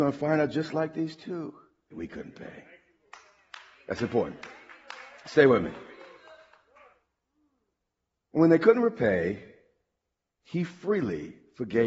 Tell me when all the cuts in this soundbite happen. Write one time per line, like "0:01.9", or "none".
0:01.9